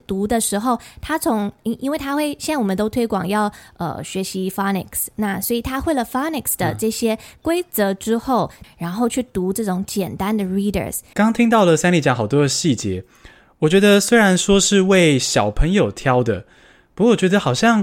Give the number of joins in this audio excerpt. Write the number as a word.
two